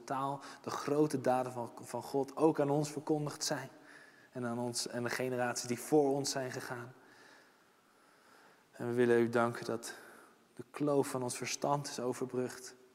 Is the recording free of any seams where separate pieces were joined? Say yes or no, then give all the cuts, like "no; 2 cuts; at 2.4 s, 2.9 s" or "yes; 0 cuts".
yes; 0 cuts